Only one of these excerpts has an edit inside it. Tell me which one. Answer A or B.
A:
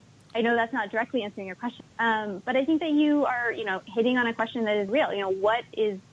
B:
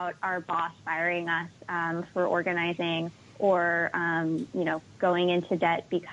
A